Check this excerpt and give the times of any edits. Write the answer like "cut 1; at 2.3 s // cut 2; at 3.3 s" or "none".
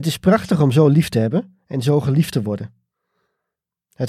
none